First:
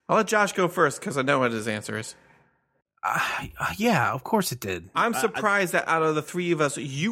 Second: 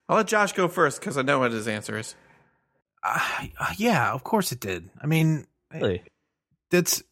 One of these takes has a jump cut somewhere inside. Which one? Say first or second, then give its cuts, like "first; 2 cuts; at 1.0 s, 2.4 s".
first; 1 cut; at 4.9 s